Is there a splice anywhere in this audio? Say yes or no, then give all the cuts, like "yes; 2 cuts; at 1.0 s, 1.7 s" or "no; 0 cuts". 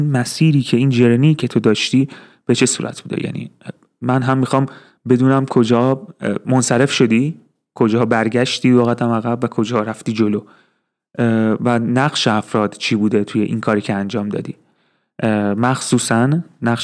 no; 0 cuts